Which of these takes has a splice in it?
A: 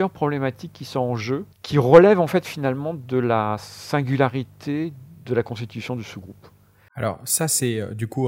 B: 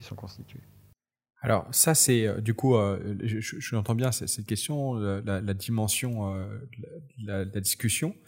A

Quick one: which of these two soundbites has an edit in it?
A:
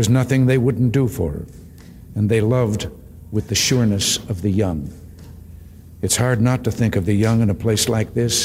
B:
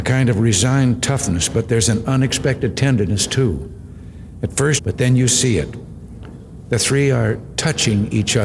B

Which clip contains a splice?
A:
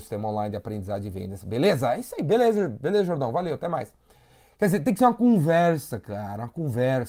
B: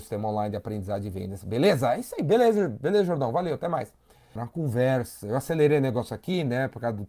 B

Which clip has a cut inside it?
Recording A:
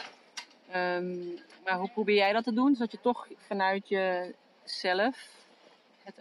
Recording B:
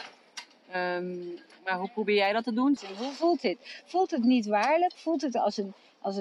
B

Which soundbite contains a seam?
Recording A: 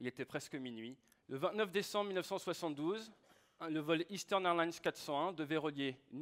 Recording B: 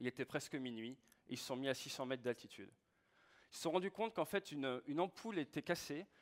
A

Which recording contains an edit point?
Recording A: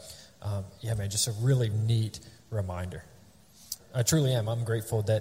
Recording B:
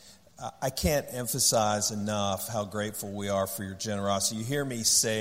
A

